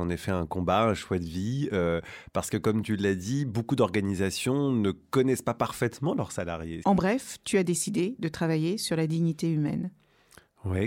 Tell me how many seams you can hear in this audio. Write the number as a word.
one